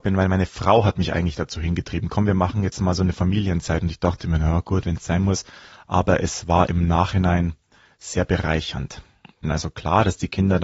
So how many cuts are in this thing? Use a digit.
1